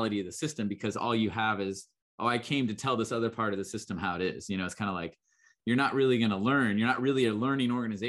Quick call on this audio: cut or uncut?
uncut